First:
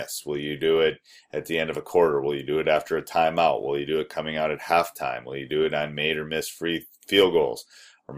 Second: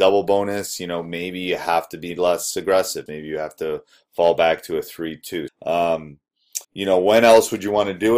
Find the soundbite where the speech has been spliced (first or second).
second